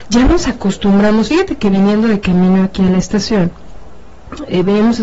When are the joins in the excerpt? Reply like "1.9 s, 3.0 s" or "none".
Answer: none